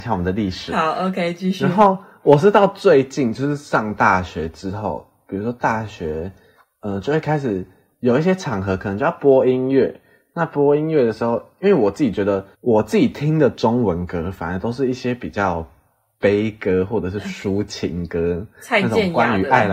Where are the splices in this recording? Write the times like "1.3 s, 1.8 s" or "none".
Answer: 12.5 s